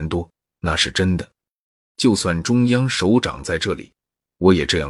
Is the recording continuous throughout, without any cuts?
no; 1 cut; at 1.9 s

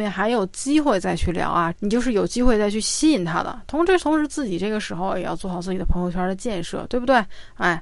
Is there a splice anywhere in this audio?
yes; 1 cut; at 1.7 s

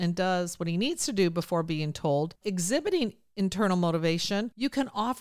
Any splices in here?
yes; 1 cut; at 2.4 s

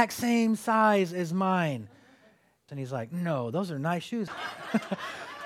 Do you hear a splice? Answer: yes; 2 cuts; at 2.7 s, 4.3 s

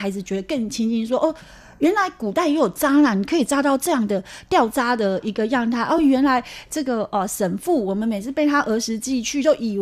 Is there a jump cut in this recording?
no; 0 cuts

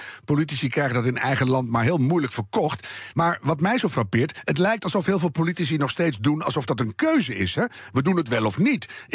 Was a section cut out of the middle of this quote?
no; 0 cuts

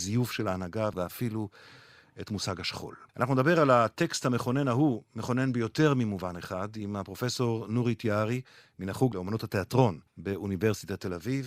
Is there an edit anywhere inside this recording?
yes; 2 cuts; at 3.1 s, 10.1 s

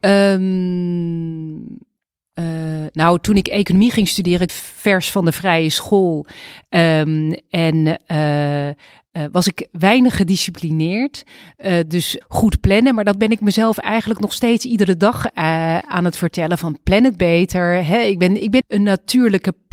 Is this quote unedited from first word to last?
no; 3 cuts; at 4.5 s, 12.2 s, 18.6 s

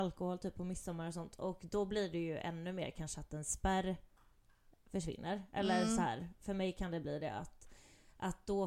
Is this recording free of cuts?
yes; 0 cuts

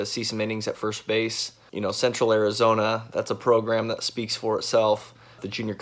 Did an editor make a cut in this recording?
no; 0 cuts

